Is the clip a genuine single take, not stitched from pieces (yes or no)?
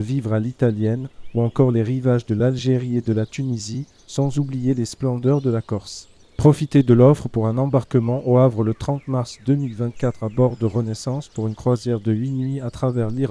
no